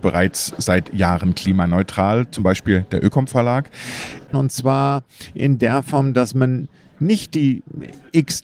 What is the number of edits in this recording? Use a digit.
1